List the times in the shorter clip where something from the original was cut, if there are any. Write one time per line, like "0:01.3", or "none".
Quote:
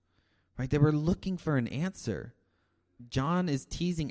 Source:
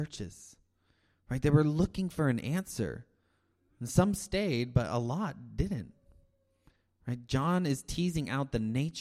0:03.0